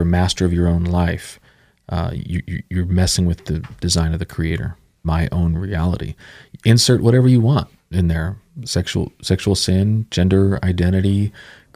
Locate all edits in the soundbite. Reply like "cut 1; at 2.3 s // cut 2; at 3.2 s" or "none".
cut 1; at 5.0 s

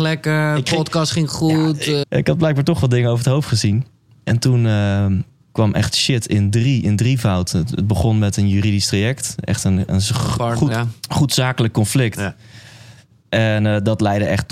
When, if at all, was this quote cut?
cut 1; at 2.0 s // cut 2; at 10.7 s

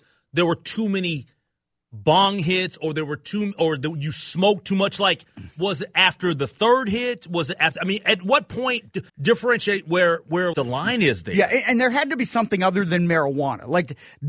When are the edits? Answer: cut 1; at 9.1 s // cut 2; at 10.5 s

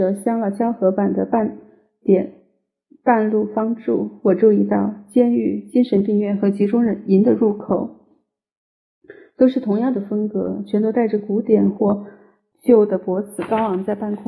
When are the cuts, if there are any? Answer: cut 1; at 12.5 s

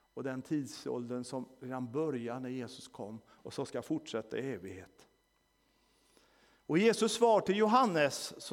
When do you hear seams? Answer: none

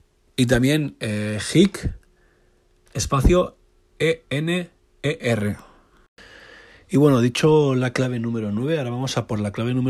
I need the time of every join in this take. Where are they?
cut 1; at 2.9 s

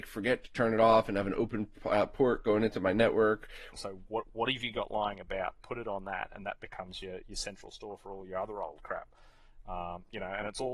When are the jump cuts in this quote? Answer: cut 1; at 3.7 s

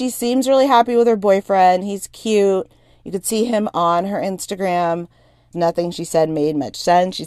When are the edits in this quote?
cut 1; at 5.5 s

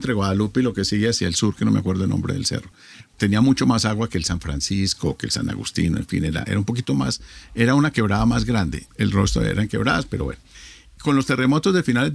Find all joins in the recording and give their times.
cut 1; at 6.4 s // cut 2; at 8.9 s

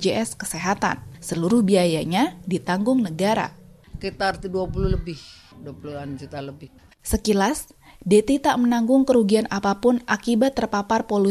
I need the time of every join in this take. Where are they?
cut 1; at 6.9 s

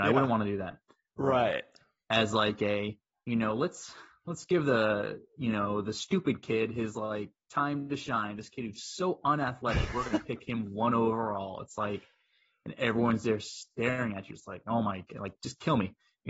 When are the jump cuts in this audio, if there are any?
cut 1; at 1.2 s

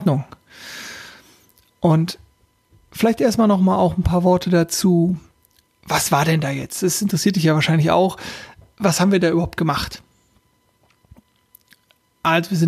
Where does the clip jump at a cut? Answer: none

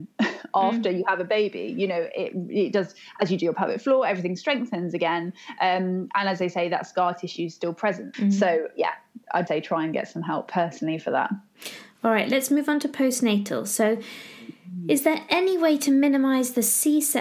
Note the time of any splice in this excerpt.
cut 1; at 8.1 s // cut 2; at 9.5 s

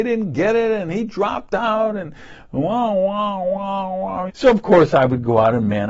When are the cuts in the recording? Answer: cut 1; at 4.3 s

